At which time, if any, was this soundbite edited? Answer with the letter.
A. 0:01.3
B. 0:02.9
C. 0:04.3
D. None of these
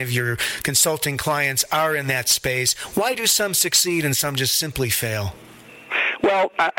D